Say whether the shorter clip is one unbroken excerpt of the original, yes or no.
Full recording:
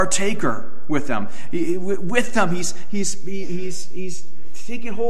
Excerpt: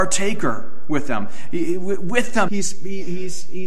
no